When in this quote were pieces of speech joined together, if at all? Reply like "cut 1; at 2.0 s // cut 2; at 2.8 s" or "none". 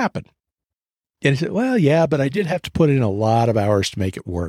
cut 1; at 1.0 s